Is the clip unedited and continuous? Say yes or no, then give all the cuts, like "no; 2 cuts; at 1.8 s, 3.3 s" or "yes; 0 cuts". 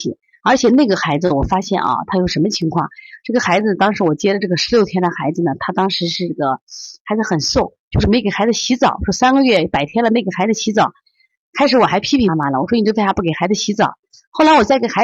no; 1 cut; at 12.3 s